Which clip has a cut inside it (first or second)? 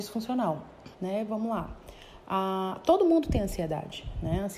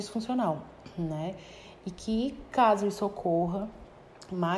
first